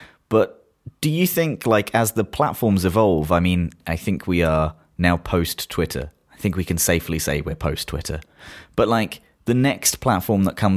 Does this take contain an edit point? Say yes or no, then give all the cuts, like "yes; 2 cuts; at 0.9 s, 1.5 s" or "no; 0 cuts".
no; 0 cuts